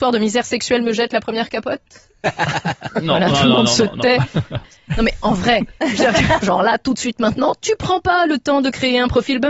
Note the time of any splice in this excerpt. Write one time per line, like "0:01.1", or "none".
0:04.6
0:06.4